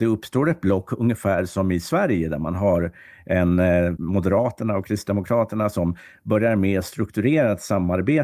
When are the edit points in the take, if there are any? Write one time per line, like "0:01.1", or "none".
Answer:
0:04.0